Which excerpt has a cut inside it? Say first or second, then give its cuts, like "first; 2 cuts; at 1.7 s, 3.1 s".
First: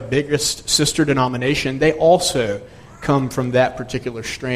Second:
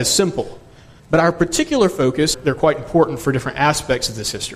second; 2 cuts; at 1.0 s, 2.3 s